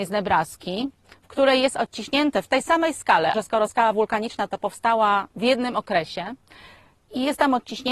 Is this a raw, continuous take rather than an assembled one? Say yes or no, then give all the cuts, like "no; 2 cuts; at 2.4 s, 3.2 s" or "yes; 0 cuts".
no; 2 cuts; at 3.3 s, 5.3 s